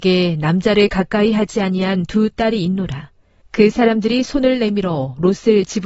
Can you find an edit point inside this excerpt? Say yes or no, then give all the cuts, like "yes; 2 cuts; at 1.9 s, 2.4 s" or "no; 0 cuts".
yes; 1 cut; at 3.4 s